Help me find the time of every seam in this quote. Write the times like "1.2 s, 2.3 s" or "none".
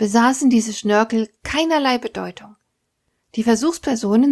none